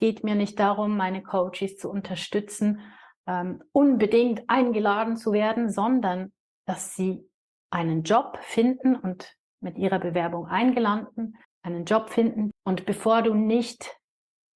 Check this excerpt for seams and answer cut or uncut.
cut